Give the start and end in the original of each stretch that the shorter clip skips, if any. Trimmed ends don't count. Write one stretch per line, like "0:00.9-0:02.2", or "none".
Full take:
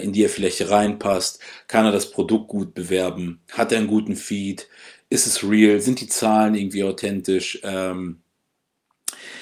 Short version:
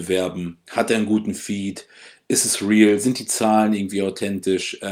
none